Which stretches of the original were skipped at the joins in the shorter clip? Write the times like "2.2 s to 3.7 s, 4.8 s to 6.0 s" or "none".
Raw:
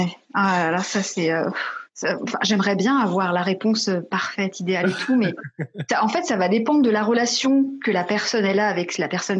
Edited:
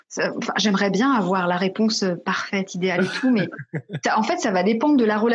none